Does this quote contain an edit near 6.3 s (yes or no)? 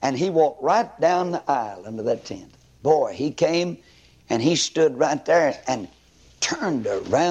no